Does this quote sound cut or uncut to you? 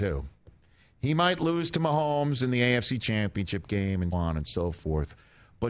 cut